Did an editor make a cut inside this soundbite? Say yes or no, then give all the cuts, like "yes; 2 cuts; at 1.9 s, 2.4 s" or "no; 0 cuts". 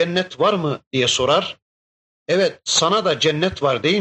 no; 0 cuts